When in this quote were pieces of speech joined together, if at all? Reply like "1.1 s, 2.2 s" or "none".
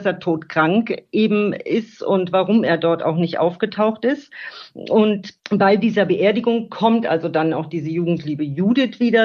5.4 s